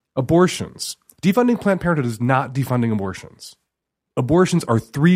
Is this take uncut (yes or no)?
yes